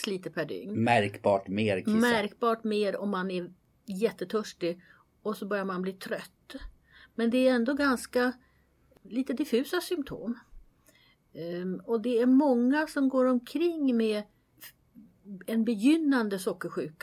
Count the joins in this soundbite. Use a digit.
0